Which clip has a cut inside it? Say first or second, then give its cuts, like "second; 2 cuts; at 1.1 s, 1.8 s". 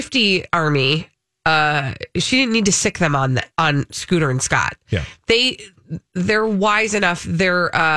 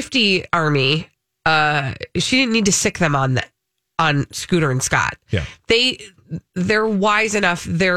first; 1 cut; at 3.5 s